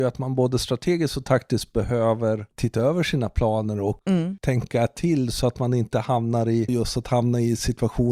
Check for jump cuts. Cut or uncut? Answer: cut